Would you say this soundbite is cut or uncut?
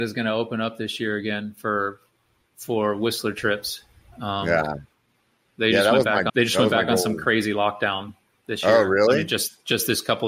cut